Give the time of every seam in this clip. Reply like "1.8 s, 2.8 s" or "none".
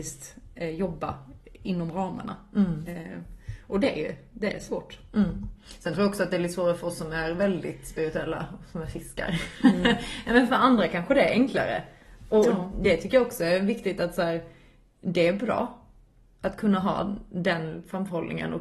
none